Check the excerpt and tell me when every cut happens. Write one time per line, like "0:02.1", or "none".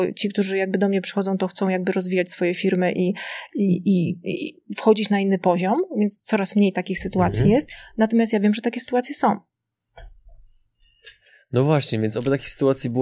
none